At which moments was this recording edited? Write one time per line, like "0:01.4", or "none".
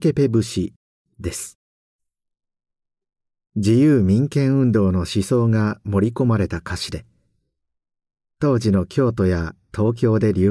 none